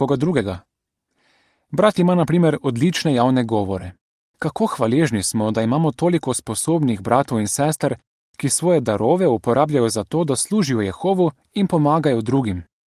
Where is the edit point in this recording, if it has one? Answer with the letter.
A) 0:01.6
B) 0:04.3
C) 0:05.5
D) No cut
B